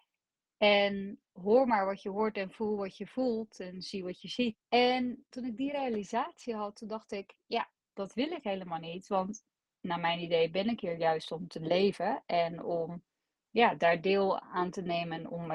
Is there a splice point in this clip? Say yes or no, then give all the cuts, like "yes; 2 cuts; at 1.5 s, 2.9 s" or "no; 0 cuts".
yes; 1 cut; at 4.5 s